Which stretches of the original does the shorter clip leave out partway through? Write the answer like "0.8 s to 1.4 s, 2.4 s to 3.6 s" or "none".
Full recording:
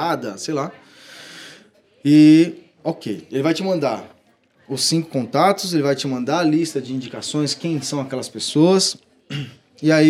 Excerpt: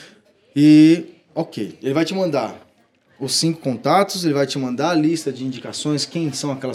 none